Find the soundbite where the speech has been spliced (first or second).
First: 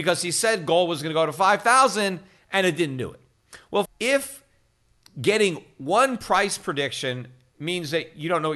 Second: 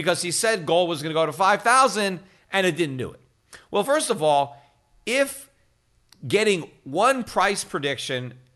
first